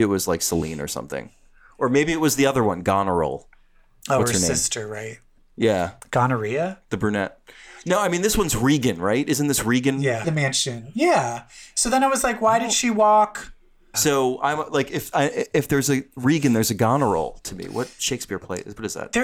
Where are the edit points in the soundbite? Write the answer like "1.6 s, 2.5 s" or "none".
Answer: 10.2 s, 13.9 s